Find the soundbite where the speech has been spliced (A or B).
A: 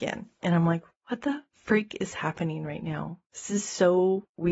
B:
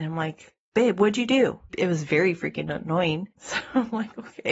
B